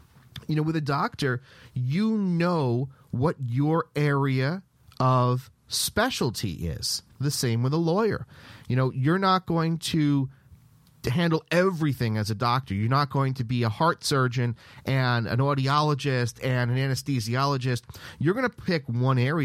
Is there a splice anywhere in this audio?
yes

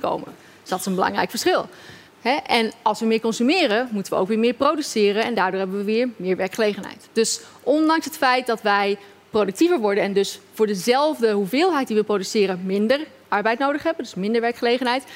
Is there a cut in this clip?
yes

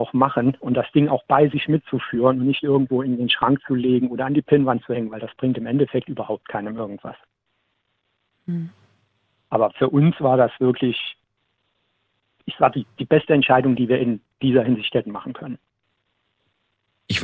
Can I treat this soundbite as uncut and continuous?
yes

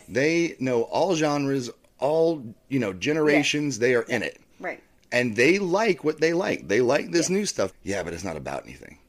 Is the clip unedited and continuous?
no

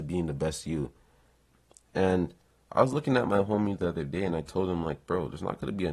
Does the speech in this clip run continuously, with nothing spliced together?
yes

